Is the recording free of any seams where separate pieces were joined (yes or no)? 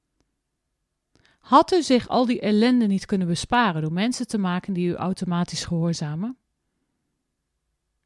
yes